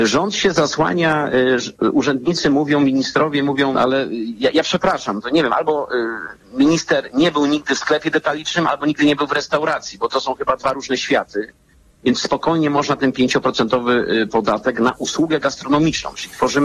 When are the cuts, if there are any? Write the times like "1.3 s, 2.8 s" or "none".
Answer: 3.7 s, 12.0 s